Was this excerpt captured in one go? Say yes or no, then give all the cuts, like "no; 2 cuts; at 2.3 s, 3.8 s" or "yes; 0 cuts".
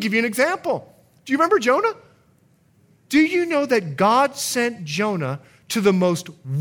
yes; 0 cuts